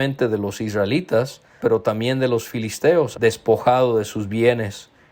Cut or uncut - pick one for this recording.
cut